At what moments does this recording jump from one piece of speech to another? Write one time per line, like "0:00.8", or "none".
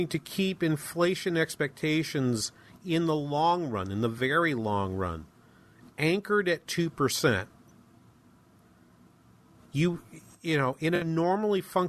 none